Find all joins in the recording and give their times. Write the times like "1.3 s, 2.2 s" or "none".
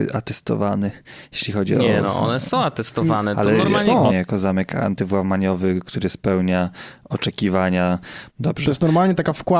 4.1 s, 8.3 s